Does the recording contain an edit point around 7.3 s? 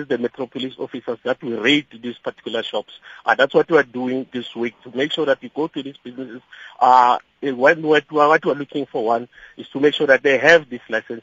no; 0 cuts

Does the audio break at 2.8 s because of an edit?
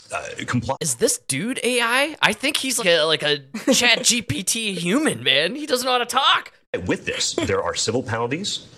yes; 1 cut; at 2.8 s

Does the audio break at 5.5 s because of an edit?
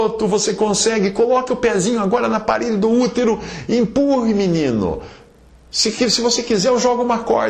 no; 0 cuts

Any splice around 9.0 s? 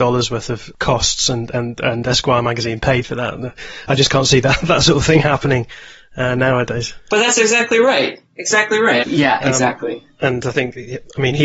yes; 1 cut; at 9.0 s

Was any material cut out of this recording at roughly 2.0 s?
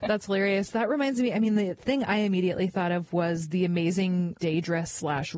no; 1 cut; at 4.4 s

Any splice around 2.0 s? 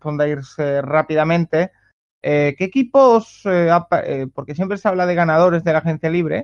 no; 0 cuts

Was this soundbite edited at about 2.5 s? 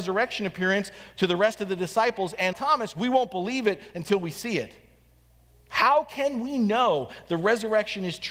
yes; 1 cut; at 2.5 s

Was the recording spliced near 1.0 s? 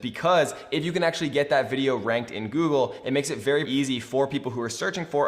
no; 1 cut; at 3.6 s

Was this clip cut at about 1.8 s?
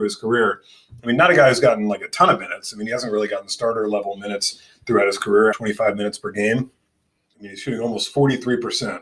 no; 2 cuts; at 5.5 s, 7.3 s

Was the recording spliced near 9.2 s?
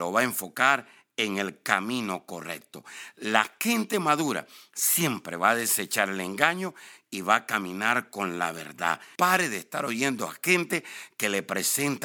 yes; 1 cut; at 9.2 s

